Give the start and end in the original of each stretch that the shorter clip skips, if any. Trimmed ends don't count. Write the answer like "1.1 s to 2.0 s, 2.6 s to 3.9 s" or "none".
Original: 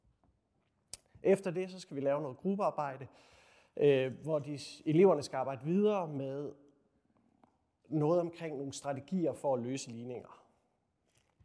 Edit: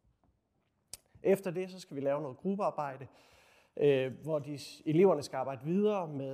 none